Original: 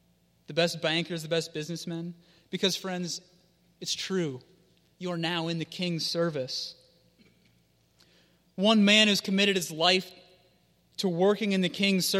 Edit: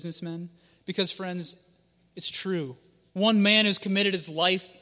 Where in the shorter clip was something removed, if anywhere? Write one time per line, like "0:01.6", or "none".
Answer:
0:03.1

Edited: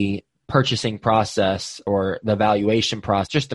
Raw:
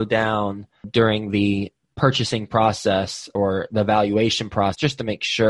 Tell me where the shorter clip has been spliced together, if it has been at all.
none

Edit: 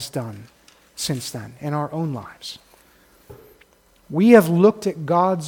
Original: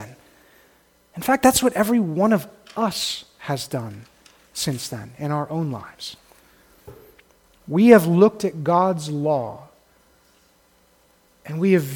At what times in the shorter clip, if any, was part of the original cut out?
none

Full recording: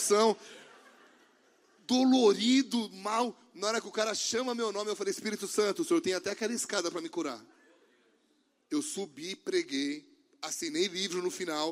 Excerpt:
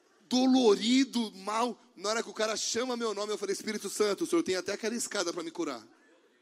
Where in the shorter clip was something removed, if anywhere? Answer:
none

